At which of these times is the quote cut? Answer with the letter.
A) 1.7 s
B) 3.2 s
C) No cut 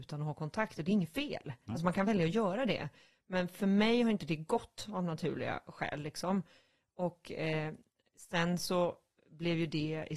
C